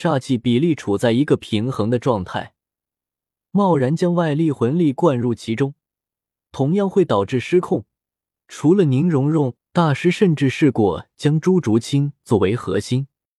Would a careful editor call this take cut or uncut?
cut